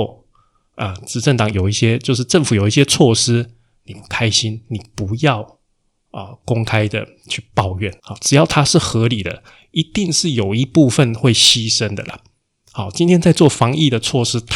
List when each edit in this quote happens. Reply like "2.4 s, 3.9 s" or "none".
8.0 s